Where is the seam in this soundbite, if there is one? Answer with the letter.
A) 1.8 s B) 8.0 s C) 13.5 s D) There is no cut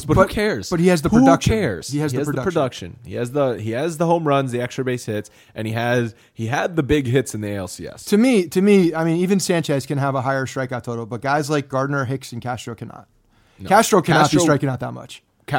D